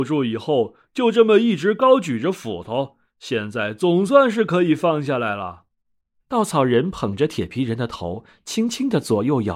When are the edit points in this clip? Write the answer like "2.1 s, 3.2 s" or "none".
6.2 s